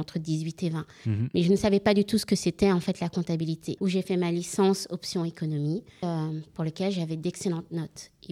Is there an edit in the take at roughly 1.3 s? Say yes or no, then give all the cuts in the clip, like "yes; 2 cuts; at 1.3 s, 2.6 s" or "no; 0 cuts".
no; 2 cuts; at 3.8 s, 6.0 s